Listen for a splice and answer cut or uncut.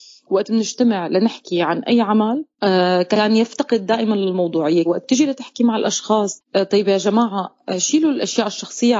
cut